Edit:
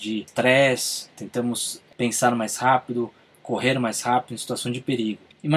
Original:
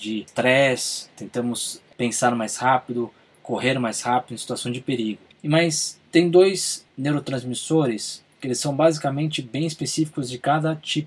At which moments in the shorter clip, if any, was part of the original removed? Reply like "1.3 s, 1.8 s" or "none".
none